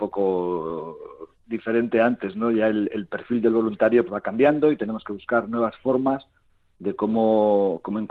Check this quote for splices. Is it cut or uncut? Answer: cut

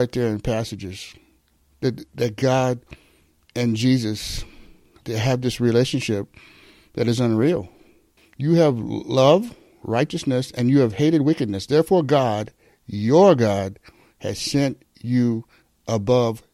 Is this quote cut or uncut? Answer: cut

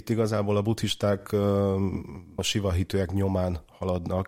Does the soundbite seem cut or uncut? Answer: cut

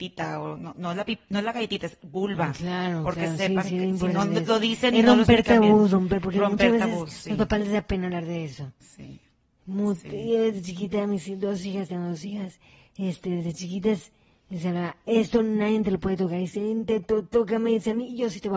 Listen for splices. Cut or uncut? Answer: uncut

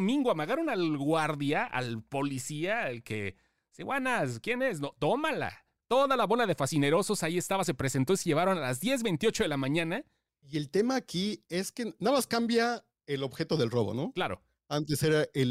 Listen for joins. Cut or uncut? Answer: cut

